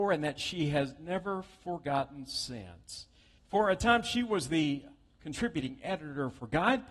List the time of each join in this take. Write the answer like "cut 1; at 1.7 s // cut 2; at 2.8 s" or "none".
cut 1; at 3.4 s